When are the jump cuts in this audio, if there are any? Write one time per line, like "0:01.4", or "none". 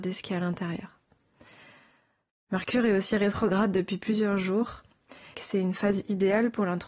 0:02.3
0:05.3